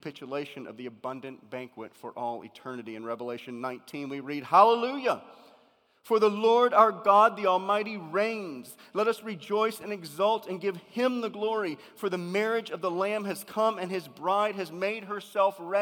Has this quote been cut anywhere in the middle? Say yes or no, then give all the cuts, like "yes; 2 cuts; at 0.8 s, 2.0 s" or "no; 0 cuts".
no; 0 cuts